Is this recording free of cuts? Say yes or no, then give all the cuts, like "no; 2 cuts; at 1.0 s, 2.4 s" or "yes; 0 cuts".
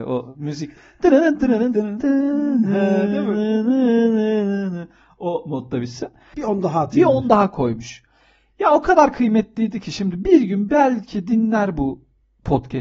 no; 1 cut; at 6.3 s